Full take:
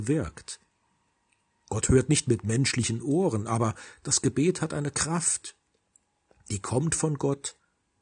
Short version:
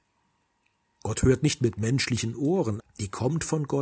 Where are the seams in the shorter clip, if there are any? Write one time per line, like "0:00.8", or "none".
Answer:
0:02.8